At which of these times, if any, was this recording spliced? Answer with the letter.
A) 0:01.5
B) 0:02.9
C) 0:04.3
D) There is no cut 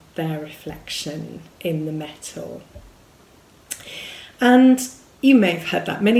A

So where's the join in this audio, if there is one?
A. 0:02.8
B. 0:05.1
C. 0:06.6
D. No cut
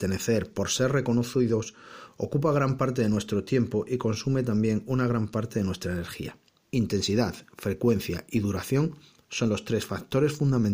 C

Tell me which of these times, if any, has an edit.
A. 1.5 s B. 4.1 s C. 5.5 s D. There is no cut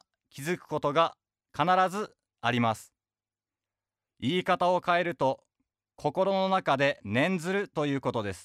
B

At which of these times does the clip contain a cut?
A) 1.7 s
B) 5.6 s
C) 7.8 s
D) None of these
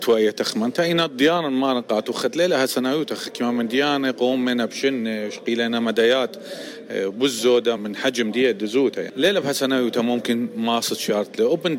C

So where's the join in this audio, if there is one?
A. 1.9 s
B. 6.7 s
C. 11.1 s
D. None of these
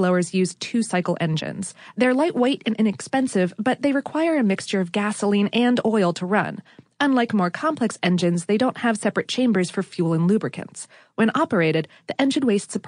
D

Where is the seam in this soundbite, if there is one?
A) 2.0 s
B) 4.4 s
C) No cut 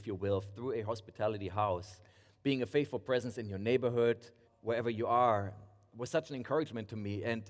B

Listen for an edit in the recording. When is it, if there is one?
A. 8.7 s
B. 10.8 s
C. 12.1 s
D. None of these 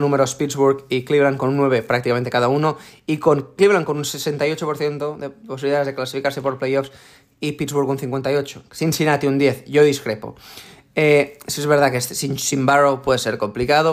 D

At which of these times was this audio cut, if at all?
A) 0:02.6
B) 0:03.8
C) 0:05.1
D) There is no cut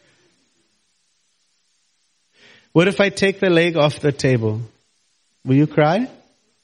D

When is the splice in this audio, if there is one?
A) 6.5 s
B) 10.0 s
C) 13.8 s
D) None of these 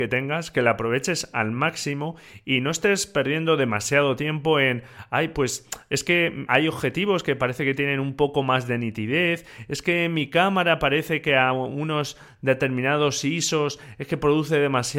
A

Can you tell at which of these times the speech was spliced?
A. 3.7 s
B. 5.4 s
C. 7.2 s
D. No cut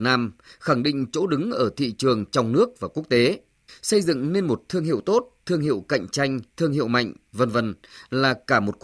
A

